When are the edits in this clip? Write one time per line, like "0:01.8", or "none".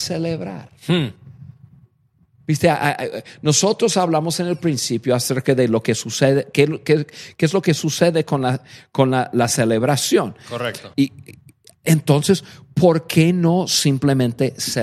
0:10.9